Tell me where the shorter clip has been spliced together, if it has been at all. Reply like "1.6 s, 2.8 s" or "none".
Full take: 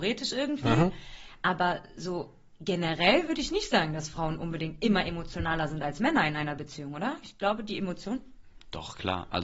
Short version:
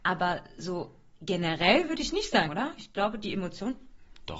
2.5 s